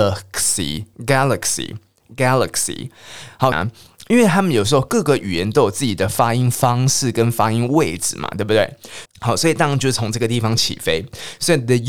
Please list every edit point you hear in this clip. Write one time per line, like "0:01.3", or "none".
0:03.5
0:09.0